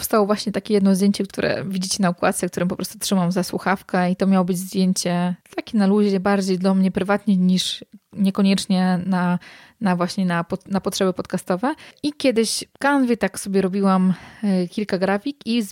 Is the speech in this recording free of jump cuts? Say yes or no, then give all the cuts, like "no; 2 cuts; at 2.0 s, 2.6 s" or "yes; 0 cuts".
yes; 0 cuts